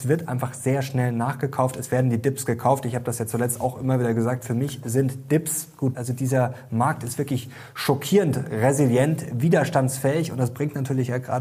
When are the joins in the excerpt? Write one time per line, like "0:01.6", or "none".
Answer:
0:05.9